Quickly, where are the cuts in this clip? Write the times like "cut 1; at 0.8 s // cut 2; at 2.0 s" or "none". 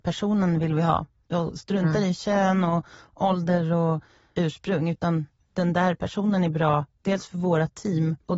none